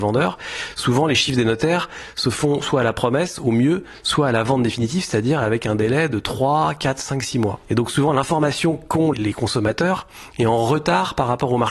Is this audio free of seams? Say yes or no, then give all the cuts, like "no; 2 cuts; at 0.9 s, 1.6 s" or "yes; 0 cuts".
no; 1 cut; at 9.1 s